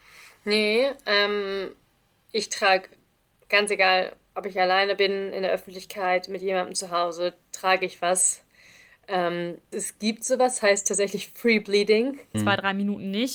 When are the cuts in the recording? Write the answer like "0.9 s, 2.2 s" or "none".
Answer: 9.7 s, 12.3 s